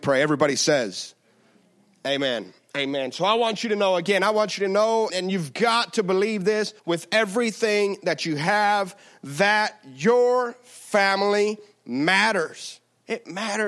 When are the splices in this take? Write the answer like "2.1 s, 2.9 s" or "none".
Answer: 5.1 s, 6.8 s